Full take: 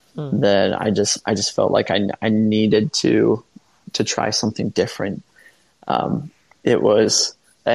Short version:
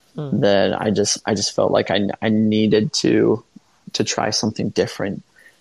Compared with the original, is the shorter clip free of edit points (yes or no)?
yes